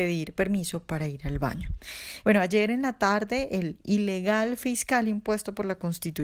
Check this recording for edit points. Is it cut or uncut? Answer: cut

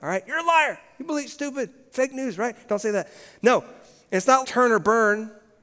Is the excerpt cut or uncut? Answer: cut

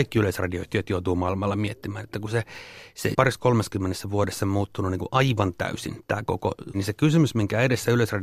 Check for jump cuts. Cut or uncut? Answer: cut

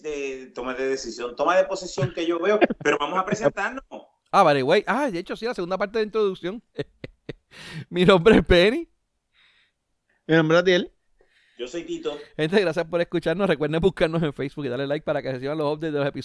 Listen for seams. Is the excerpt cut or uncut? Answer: uncut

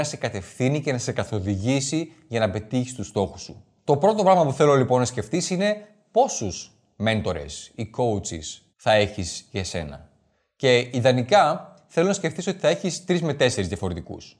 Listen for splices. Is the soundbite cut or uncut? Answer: cut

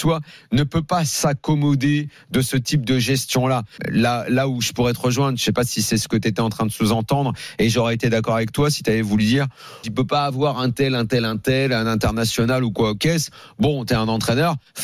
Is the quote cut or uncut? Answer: cut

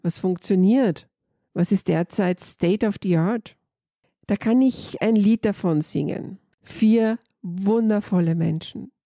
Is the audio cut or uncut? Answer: cut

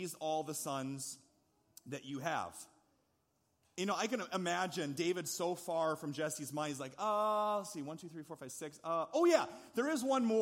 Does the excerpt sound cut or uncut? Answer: uncut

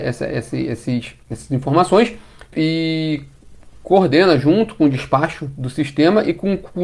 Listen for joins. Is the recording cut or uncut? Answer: cut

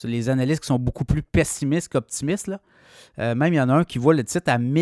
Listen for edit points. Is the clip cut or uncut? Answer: uncut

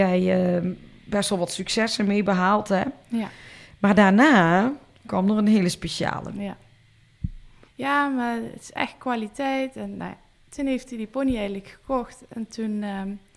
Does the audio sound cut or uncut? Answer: cut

